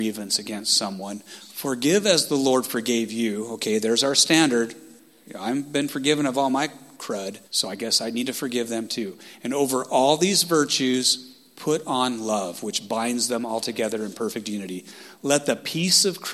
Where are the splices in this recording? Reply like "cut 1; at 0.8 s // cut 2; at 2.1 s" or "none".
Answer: cut 1; at 7.4 s